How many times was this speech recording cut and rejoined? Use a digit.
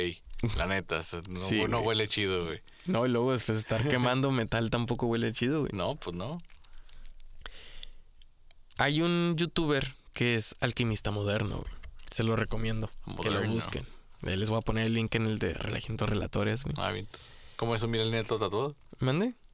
0